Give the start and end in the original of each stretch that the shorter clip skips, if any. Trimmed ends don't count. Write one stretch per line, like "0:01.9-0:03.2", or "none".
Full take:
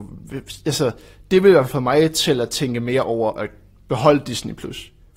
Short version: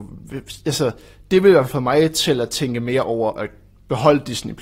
none